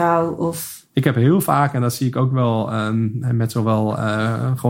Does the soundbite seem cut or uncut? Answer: uncut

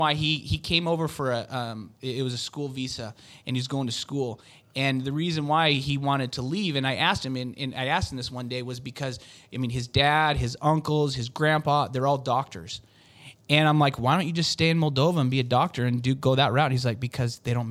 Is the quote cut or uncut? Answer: uncut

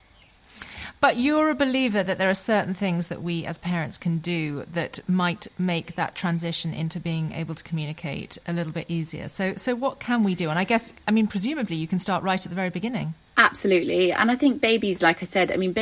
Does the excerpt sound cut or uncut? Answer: uncut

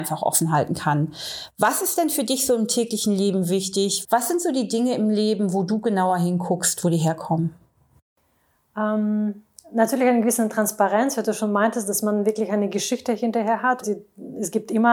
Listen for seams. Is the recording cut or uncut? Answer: cut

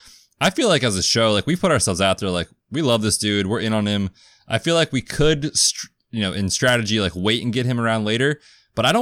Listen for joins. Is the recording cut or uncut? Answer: uncut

